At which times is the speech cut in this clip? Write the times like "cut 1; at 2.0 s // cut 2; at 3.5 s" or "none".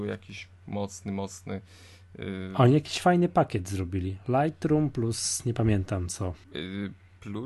cut 1; at 6.4 s